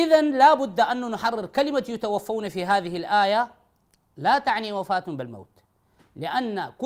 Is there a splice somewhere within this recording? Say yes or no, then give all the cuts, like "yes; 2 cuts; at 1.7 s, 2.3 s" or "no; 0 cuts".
no; 0 cuts